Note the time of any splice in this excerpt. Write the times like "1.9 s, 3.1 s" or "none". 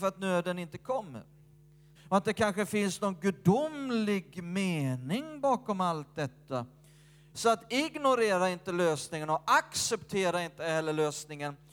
2.0 s, 7.3 s

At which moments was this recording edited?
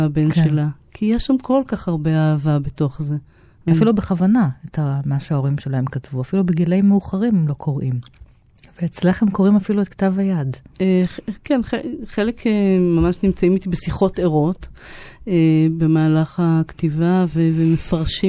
3.7 s

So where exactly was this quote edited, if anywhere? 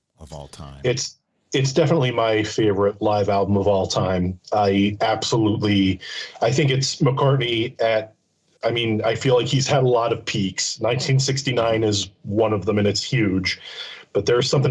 none

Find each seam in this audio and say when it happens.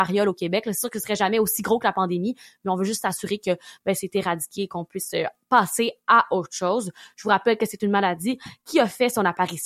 none

